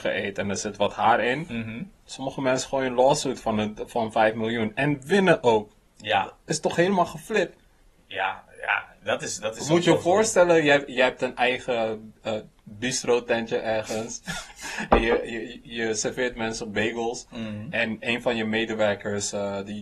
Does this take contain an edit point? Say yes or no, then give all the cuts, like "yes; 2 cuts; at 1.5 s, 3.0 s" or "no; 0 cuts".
no; 0 cuts